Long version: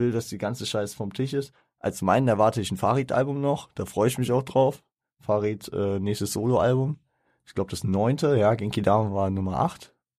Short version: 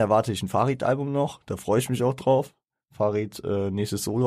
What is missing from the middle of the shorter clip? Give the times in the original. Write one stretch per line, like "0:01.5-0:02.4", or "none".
none